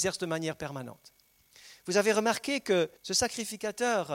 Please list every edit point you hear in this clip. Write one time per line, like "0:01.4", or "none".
0:03.0